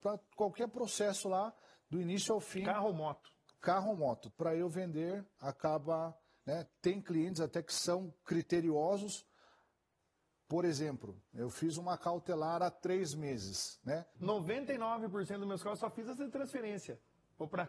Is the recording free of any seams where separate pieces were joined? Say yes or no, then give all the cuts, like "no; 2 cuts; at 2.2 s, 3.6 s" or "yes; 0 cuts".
no; 2 cuts; at 4.3 s, 14.1 s